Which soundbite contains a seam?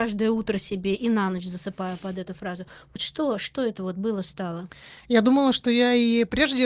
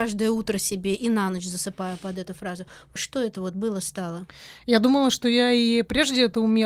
second; 1 cut; at 3.0 s

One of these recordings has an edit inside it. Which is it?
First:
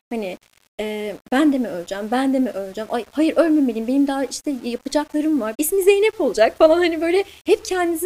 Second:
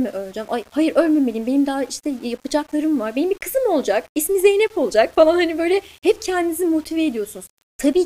first; 1 cut; at 5.5 s

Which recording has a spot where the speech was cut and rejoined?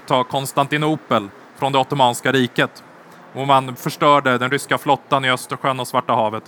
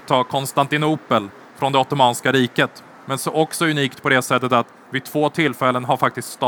second; 1 cut; at 2.9 s

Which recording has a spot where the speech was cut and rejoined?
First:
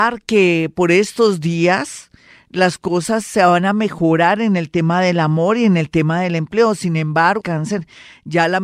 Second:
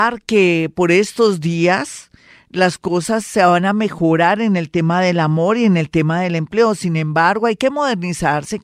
first; 1 cut; at 7.4 s

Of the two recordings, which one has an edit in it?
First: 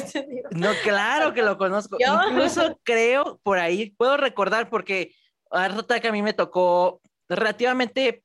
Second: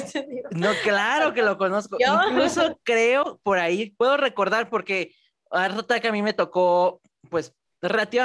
first; 1 cut; at 7.2 s

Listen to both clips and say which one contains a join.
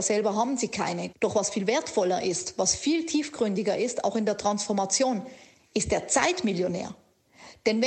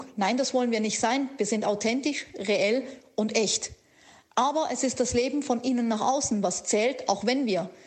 first; 1 cut; at 1.1 s

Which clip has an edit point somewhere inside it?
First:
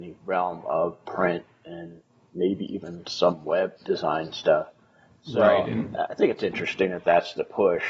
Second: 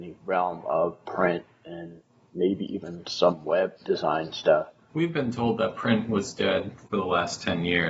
second; 1 cut; at 4.9 s

